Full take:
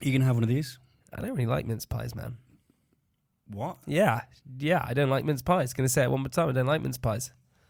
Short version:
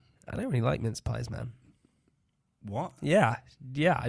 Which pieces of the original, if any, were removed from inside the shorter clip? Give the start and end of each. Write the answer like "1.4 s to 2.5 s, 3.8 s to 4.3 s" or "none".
none